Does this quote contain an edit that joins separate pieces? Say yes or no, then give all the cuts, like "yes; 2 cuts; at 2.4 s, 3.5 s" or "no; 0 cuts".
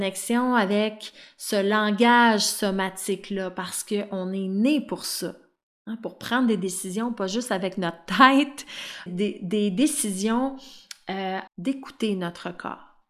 yes; 2 cuts; at 9.1 s, 11.5 s